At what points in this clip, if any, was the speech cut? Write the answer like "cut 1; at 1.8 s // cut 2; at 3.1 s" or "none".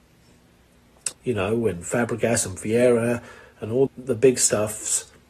cut 1; at 1.1 s // cut 2; at 3.9 s

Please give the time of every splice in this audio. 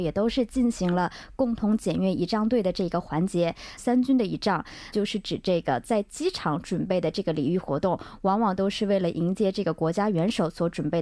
cut 1; at 3.8 s // cut 2; at 4.9 s

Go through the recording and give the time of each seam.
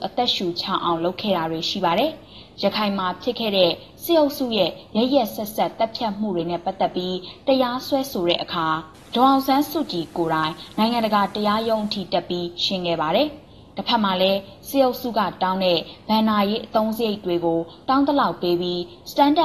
none

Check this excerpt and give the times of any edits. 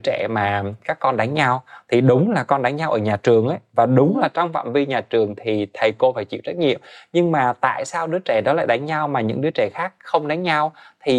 none

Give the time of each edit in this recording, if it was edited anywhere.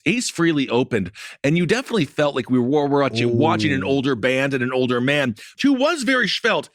cut 1; at 5.6 s

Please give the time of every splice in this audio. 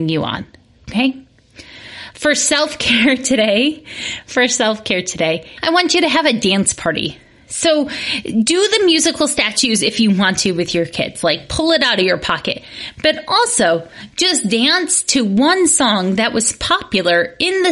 none

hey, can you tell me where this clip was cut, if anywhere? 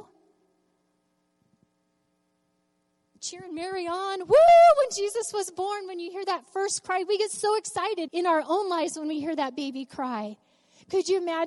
cut 1; at 8.1 s

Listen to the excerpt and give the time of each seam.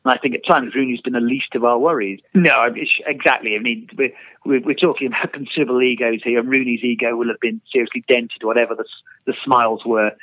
cut 1; at 2.3 s

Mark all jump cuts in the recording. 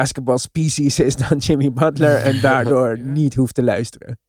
none

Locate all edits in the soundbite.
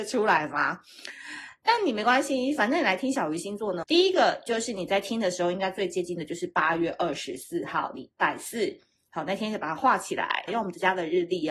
cut 1; at 3.8 s // cut 2; at 10.5 s

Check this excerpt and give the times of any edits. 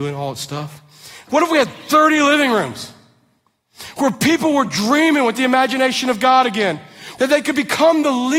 cut 1; at 1.3 s // cut 2; at 7.2 s

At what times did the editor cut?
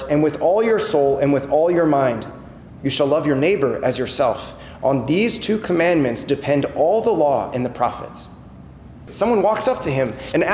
cut 1; at 2.8 s // cut 2; at 9.1 s

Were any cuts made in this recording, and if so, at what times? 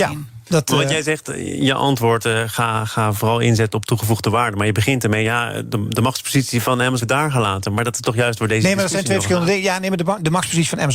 cut 1; at 7.0 s

